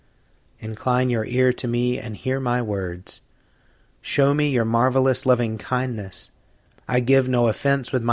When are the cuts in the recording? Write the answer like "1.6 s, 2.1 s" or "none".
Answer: 6.8 s